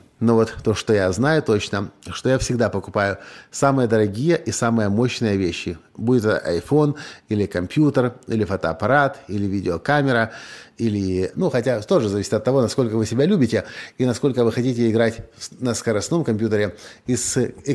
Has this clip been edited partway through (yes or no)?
yes